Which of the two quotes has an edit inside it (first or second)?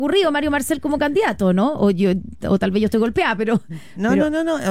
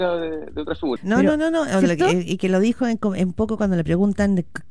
second